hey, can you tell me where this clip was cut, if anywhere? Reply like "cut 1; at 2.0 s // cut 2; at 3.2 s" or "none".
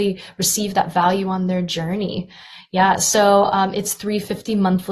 none